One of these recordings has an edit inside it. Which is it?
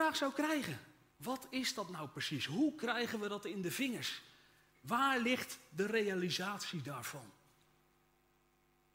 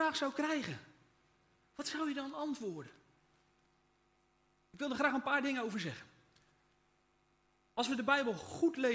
first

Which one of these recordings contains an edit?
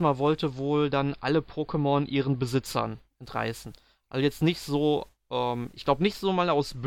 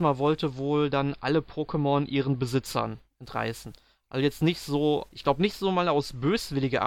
second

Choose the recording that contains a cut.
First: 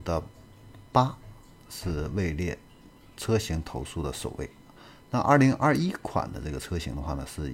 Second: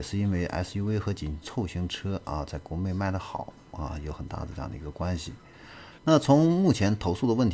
second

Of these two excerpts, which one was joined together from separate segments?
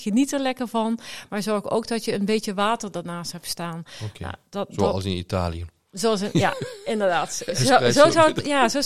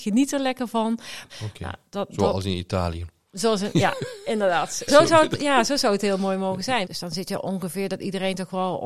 second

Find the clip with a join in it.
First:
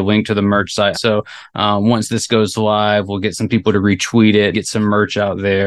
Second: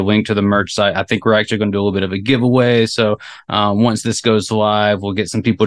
first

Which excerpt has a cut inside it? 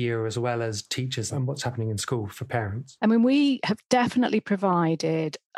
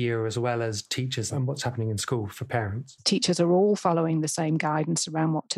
second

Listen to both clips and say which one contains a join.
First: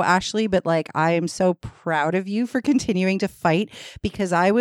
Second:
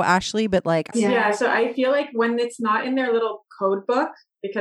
second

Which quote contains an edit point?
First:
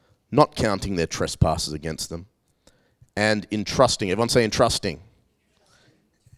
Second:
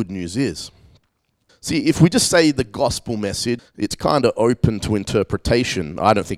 second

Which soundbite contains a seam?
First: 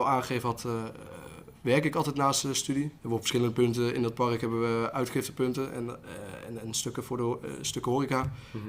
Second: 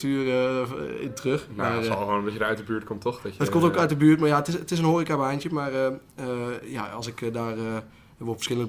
first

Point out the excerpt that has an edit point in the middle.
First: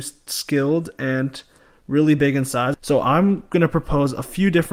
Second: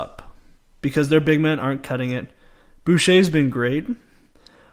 first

